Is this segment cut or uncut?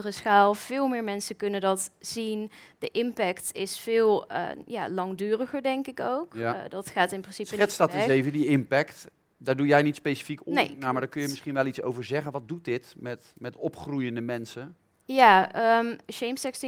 uncut